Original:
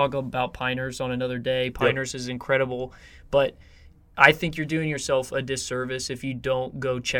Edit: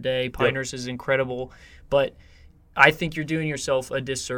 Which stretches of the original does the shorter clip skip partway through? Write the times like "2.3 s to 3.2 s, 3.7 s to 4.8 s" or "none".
none

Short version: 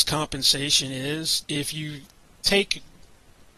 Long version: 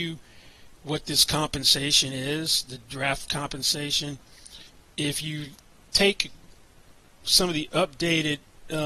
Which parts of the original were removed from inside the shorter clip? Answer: 2.6 s to 4.9 s

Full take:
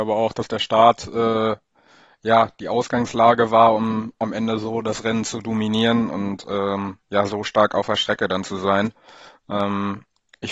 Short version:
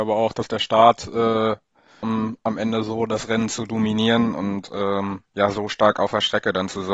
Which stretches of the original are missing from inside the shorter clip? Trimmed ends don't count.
2.0 s to 3.8 s

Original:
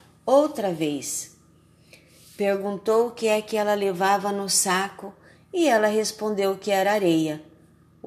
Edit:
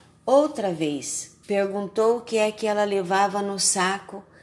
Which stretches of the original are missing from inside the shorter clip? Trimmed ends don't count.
1.4 s to 2.3 s

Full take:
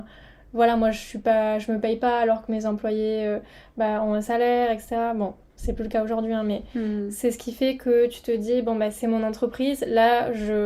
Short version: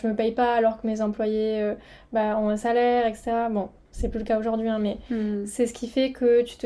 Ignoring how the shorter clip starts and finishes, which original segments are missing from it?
none

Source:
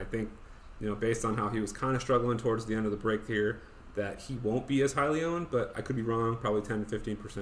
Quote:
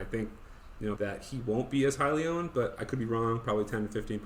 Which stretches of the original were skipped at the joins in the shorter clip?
1.0 s to 3.9 s

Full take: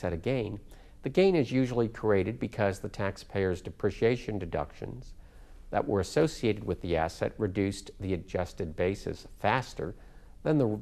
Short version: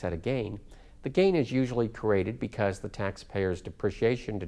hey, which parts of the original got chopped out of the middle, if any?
none

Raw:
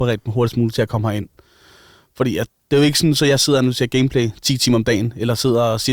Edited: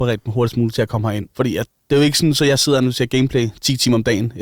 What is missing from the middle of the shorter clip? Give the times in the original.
1.3 s to 2.1 s

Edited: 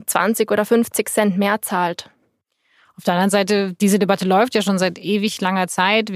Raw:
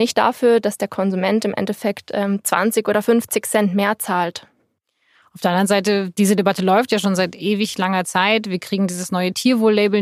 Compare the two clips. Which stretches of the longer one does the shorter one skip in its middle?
none

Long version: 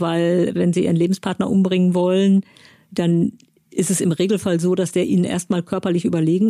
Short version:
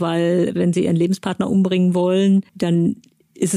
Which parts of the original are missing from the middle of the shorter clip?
2.5 s to 2.9 s

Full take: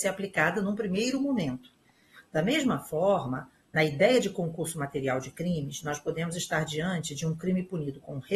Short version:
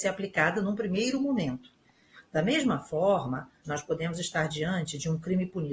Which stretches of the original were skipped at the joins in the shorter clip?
3.6 s to 5.8 s

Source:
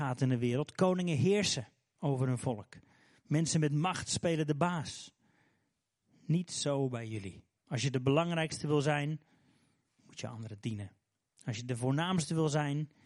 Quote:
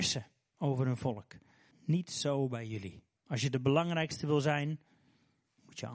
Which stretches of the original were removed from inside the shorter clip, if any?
3.1 s to 6.1 s

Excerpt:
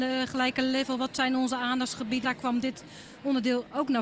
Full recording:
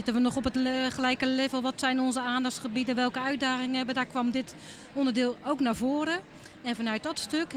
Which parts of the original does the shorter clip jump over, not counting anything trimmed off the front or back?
2.9 s to 3.9 s

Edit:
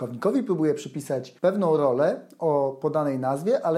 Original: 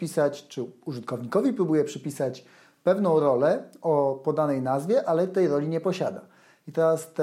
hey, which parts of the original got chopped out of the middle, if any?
2.5 s to 2.8 s

